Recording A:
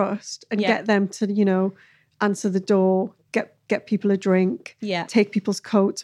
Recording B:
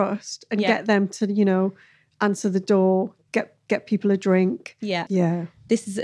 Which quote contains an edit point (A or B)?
B